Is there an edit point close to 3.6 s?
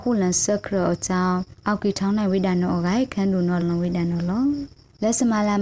yes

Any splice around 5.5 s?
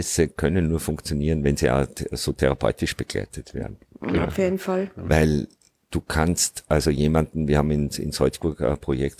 no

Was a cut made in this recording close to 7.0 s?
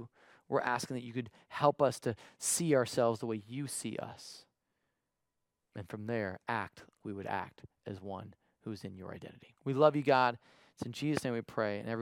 yes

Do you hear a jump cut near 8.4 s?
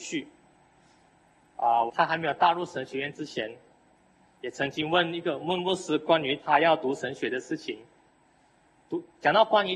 no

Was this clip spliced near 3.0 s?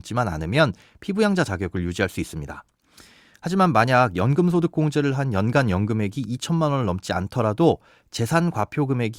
no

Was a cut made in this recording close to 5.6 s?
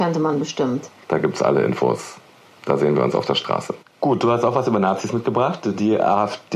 no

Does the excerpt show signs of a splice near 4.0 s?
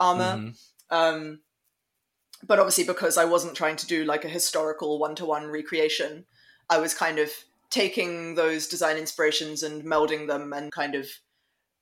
no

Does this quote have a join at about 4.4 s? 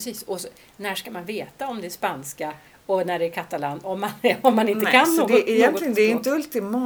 no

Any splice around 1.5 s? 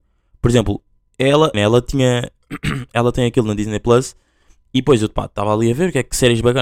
yes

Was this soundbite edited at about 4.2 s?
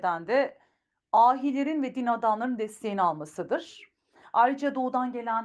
yes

